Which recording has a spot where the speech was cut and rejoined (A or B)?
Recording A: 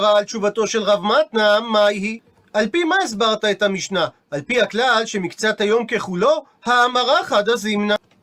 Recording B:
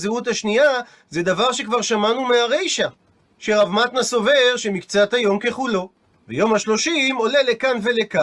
B